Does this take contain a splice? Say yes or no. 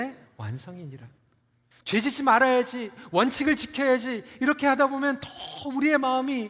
yes